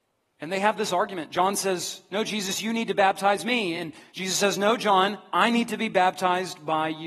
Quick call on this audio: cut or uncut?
uncut